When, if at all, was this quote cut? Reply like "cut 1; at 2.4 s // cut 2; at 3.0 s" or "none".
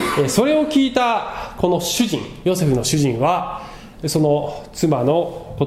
none